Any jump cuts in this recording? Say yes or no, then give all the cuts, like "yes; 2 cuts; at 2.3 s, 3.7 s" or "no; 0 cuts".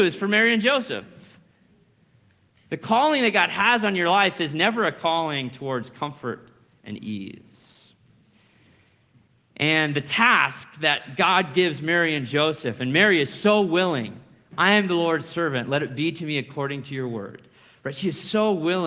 no; 0 cuts